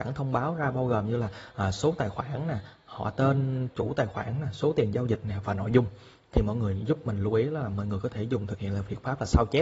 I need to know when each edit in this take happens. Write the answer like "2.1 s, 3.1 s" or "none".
none

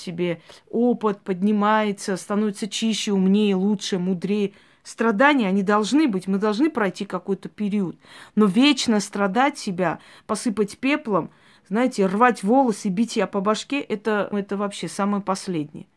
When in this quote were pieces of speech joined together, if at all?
14.3 s

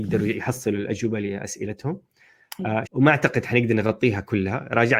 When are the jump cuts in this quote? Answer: 2.9 s

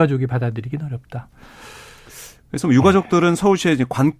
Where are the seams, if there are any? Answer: none

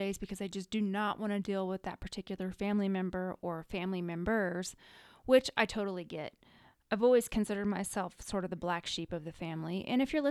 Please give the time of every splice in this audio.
none

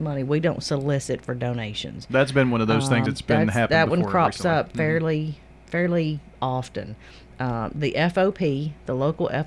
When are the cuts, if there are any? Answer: none

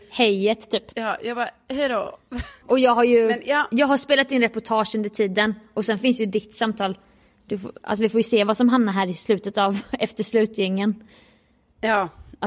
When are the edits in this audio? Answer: 0.9 s, 2.6 s

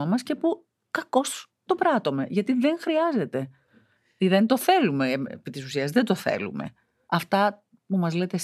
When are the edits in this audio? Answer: 7.1 s

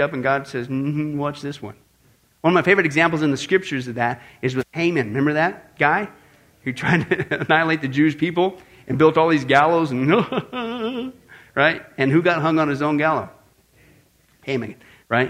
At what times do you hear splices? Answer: none

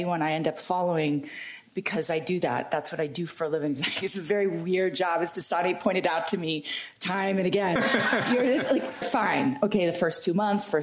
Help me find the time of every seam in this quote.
7.8 s, 9.0 s

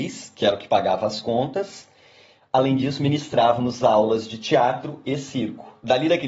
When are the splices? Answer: none

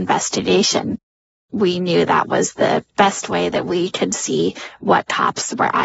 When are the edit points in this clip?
1.5 s

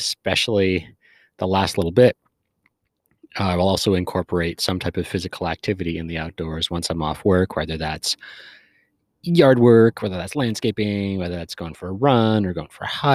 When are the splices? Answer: none

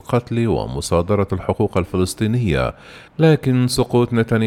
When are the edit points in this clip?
3.1 s

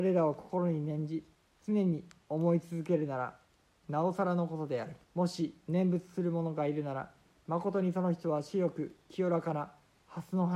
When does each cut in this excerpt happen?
5.0 s

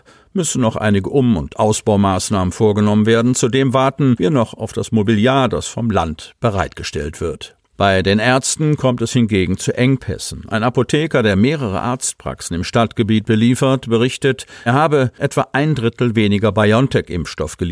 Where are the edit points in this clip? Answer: 7.7 s, 14.7 s

